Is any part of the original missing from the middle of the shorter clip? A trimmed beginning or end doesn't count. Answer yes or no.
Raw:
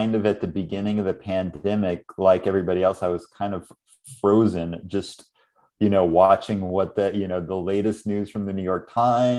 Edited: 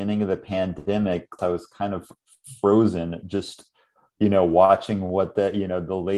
yes